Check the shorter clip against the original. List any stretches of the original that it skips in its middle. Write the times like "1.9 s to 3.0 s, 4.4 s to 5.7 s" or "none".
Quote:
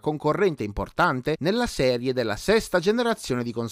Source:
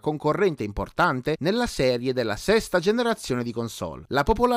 none